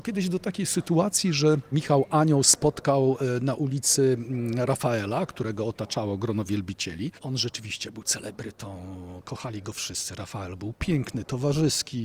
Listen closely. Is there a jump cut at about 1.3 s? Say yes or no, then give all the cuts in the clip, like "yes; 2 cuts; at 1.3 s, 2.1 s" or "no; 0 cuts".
no; 0 cuts